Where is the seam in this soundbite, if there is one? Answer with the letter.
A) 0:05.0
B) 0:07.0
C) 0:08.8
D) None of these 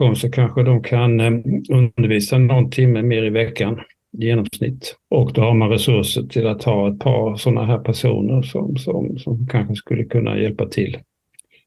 A